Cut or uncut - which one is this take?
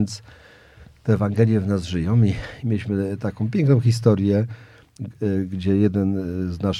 uncut